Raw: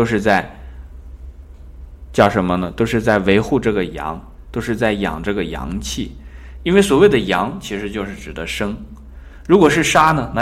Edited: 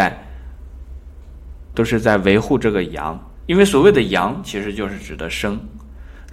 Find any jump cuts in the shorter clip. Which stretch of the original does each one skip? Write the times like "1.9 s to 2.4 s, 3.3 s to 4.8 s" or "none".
2.1 s to 2.8 s, 4.4 s to 6.6 s

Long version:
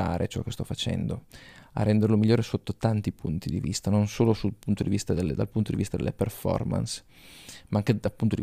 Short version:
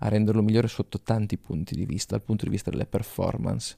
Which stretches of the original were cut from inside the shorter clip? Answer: 3.8 s to 5.4 s

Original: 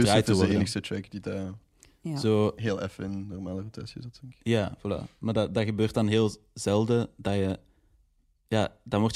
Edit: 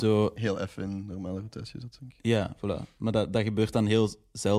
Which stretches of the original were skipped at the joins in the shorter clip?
none

